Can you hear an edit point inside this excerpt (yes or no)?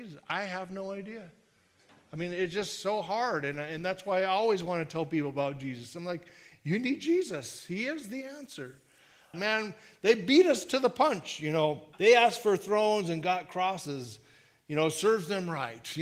yes